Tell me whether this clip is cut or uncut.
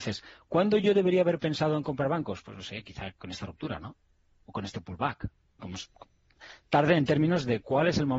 cut